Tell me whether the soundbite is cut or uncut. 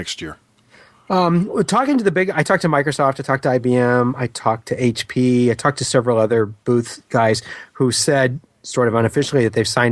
uncut